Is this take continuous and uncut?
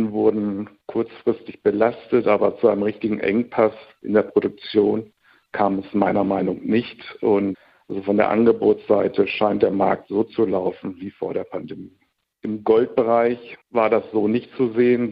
no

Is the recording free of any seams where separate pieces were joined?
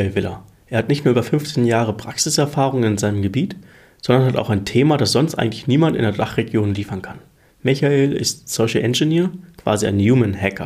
yes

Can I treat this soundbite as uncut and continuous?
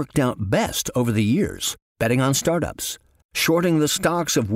no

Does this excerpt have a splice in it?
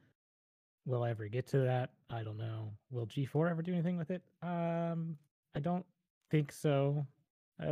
no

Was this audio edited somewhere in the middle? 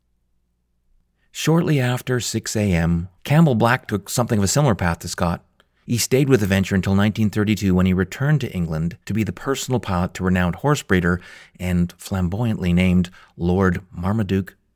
yes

